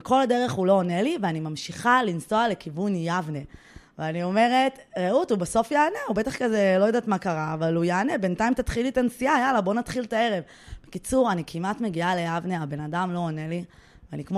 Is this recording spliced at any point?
no; 0 cuts

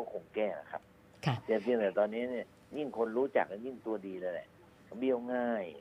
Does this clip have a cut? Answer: no; 0 cuts

